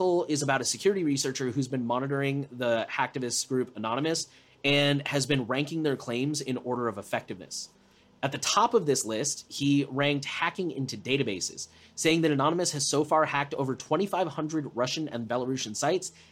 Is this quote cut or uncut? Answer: uncut